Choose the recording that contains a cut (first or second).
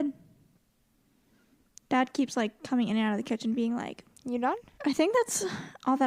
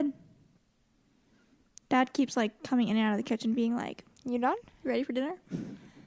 first